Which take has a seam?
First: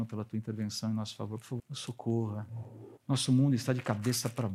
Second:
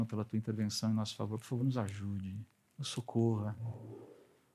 first; 2 cuts; at 1.6 s, 3.0 s

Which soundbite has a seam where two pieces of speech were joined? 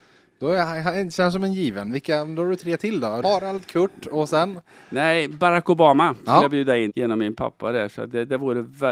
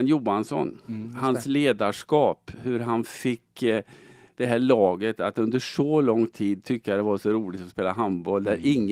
first; 2 cuts; at 3.2 s, 6.9 s

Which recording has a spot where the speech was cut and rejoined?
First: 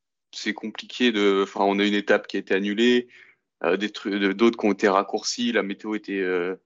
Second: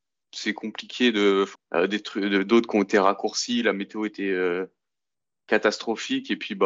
second; 1 cut; at 1.5 s

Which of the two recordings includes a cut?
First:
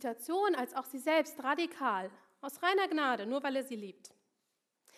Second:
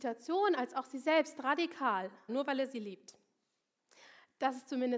second; 1 cut; at 2.3 s

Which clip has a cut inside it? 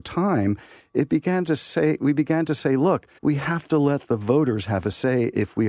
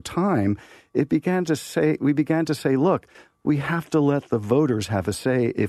first; 1 cut; at 3.2 s

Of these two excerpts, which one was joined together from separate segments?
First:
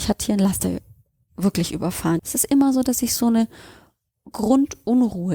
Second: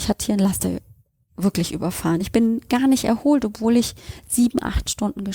first; 1 cut; at 2.2 s

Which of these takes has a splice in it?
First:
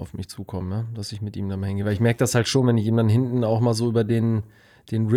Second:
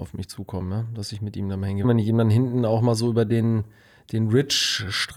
second; 1 cut; at 1.8 s

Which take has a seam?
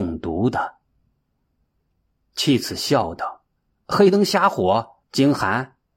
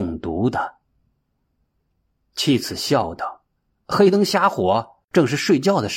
first; 1 cut; at 5.0 s

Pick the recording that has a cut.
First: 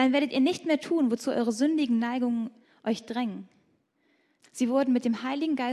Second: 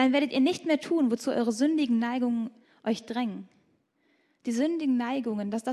first; 1 cut; at 4.4 s

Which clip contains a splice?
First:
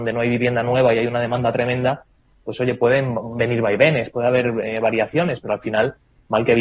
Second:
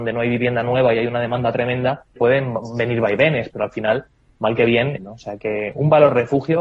second; 3 cuts; at 2.2 s, 3.5 s, 5.0 s

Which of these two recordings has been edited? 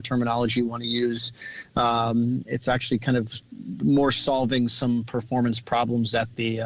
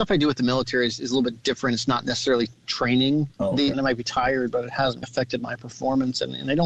second; 2 cuts; at 3.7 s, 5.0 s

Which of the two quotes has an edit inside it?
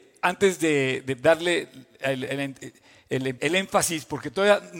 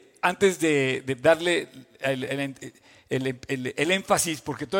first; 1 cut; at 3.4 s

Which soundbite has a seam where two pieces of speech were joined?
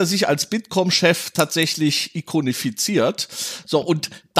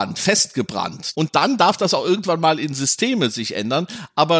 second; 1 cut; at 1.1 s

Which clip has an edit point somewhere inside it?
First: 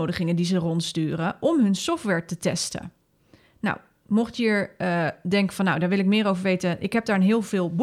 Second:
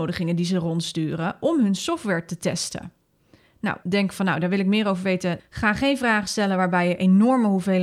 second; 2 cuts; at 3.8 s, 5.4 s

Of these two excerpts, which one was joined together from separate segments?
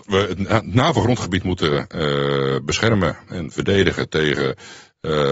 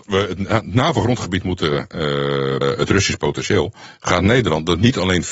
second; 1 cut; at 2.6 s

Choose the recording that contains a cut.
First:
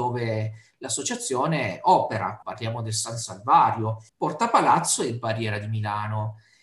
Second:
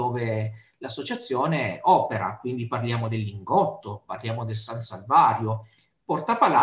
first; 2 cuts; at 2.4 s, 4.1 s

